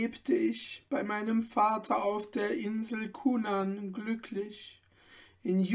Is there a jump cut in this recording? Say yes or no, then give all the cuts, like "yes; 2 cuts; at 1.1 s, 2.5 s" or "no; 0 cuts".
no; 0 cuts